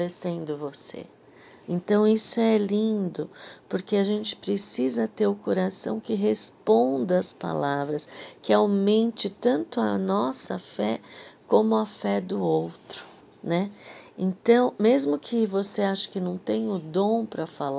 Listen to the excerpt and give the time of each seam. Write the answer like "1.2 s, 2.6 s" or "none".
1.6 s